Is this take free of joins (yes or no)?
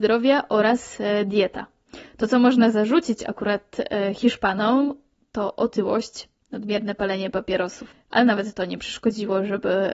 yes